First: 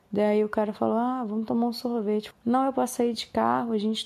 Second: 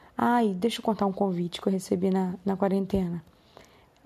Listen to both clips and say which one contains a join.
first; 1 cut; at 2.3 s

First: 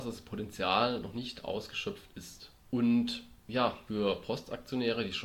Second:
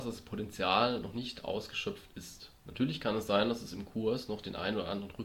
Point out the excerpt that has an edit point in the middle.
first; 2 cuts; at 2.6 s, 3.9 s

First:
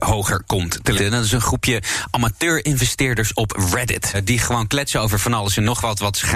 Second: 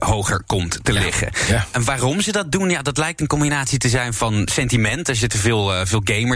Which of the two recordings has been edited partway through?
first; 2 cuts; at 1.0 s, 4.1 s

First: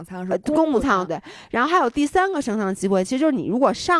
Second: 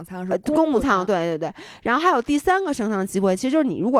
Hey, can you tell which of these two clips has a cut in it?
first; 1 cut; at 1.1 s

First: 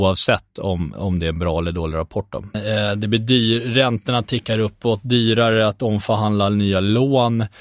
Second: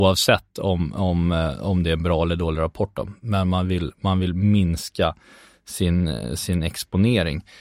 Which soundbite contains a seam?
first; 2 cuts; at 0.9 s, 2.5 s

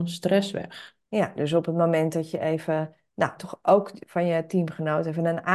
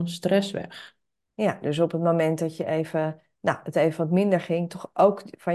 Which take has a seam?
first; 2 cuts; at 1.0 s, 3.4 s

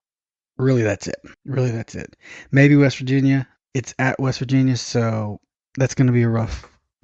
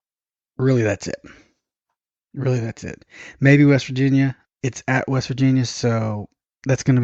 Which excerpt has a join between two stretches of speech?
first; 1 cut; at 1.3 s

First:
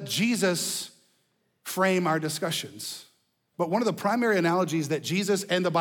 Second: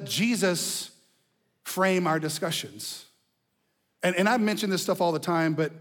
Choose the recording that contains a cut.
first; 1 cut; at 3.5 s

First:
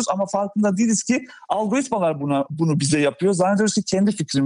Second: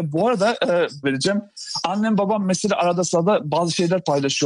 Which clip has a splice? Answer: second; 1 cut; at 1.0 s

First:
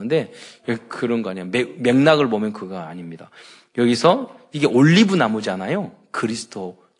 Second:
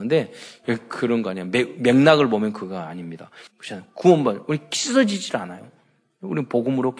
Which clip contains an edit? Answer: second; 1 cut; at 3.5 s

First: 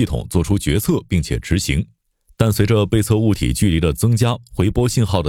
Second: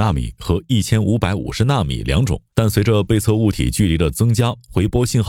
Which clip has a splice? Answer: second; 1 cut; at 2.5 s

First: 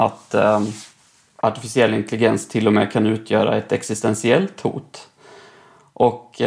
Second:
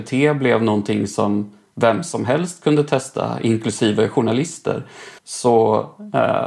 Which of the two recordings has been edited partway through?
second; 1 cut; at 5.2 s

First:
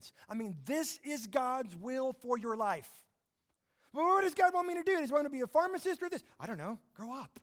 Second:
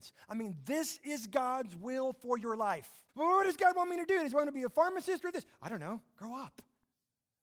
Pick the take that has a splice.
second; 1 cut; at 3.1 s

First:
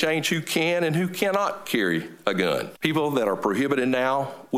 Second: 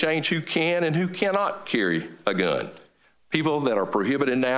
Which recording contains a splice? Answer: first; 1 cut; at 2.7 s

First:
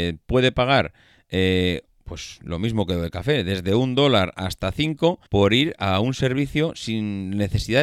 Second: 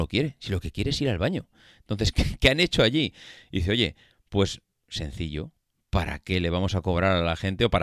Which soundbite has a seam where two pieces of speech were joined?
first; 1 cut; at 5.3 s

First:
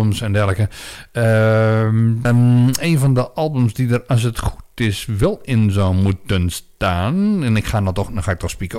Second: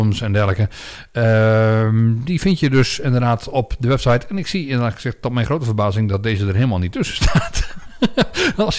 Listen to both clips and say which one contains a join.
first; 1 cut; at 2.2 s

